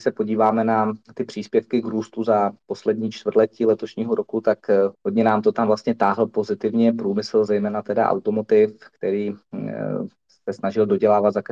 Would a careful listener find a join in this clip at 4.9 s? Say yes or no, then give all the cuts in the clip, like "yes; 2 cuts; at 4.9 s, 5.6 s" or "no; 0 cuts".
yes; 1 cut; at 4.9 s